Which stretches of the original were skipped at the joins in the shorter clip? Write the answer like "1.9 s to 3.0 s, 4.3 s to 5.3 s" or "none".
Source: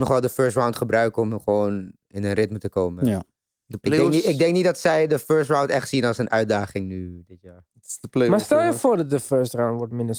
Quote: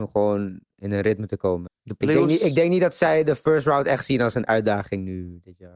3.0 s to 3.5 s